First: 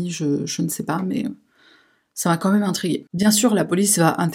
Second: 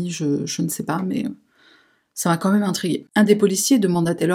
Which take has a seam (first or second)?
second